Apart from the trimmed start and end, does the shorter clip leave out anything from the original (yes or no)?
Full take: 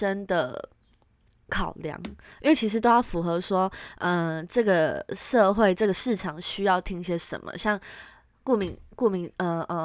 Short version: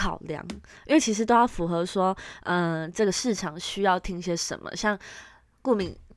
yes